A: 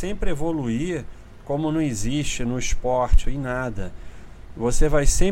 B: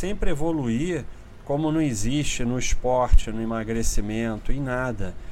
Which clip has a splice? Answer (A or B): A